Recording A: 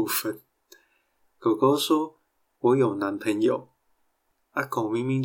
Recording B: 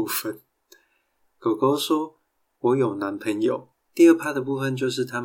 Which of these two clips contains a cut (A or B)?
B